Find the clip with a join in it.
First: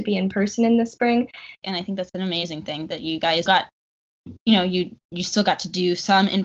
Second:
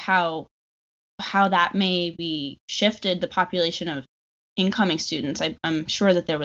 first; 2 cuts; at 1.6 s, 3.5 s

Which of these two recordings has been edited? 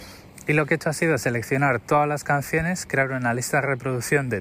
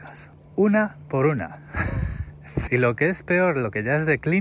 second; 1 cut; at 2.7 s

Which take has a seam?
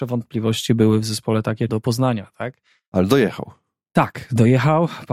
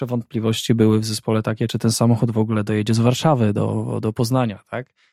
first; 1 cut; at 1.7 s

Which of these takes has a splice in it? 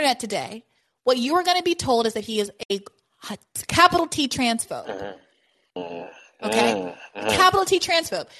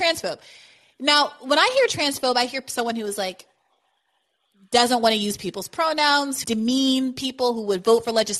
second; 1 cut; at 6.4 s

